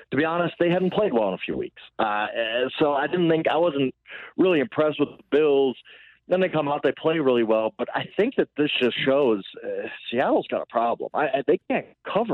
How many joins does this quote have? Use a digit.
1